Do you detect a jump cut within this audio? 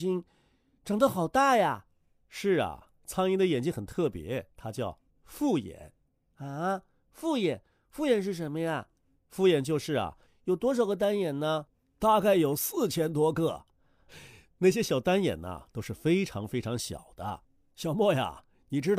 yes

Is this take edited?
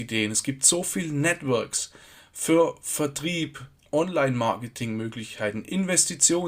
no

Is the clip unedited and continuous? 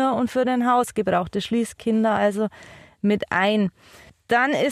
yes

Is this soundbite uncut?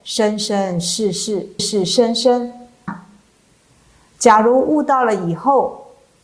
no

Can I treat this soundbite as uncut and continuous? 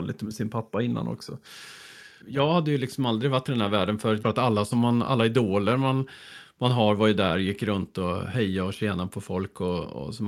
no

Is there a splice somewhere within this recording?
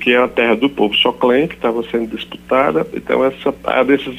no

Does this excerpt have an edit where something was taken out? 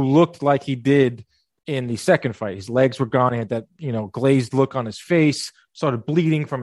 no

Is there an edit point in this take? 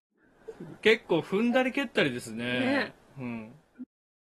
no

